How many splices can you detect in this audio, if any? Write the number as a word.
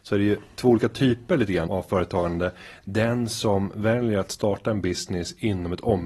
one